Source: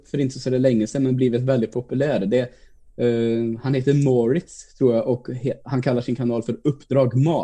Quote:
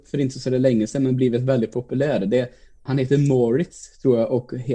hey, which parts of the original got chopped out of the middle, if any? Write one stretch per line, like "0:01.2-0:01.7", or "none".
0:02.9-0:03.6